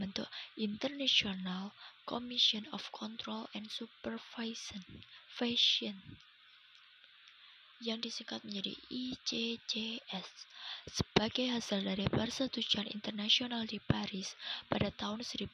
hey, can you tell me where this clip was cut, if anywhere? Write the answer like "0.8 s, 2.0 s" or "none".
none